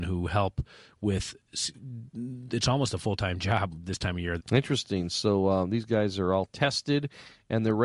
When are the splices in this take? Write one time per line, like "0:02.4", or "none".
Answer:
0:04.4